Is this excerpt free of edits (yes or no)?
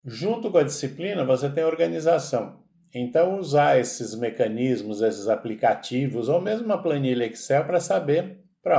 yes